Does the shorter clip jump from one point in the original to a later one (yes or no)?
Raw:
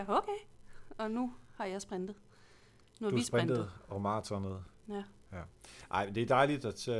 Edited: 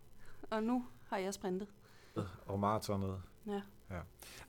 yes